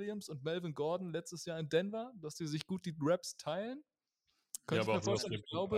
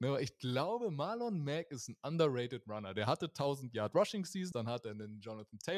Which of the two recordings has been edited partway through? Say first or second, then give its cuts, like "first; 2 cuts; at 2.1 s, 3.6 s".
second; 1 cut; at 4.5 s